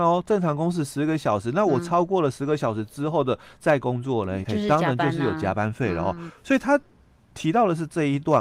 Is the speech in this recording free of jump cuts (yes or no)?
no